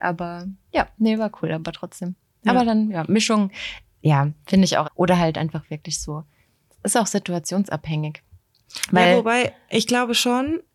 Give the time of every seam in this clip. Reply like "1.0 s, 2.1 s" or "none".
4.8 s